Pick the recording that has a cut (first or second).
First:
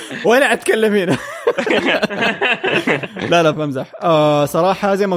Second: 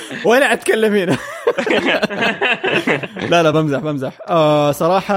first